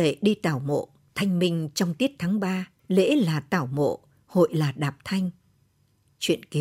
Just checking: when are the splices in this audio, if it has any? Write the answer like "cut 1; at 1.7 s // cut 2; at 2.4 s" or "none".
cut 1; at 1.1 s // cut 2; at 2.8 s